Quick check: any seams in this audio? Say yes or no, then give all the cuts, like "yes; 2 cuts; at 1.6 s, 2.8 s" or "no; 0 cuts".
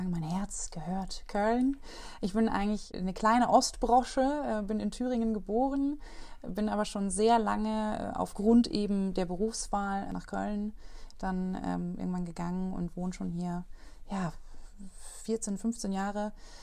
no; 0 cuts